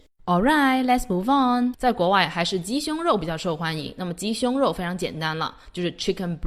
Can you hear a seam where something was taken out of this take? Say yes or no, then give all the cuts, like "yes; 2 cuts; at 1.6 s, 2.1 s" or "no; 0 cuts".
yes; 1 cut; at 1.7 s